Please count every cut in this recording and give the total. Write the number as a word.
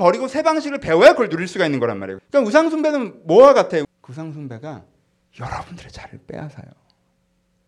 two